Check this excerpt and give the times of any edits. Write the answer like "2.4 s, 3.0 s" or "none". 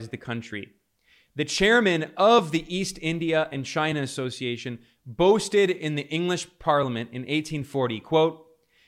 none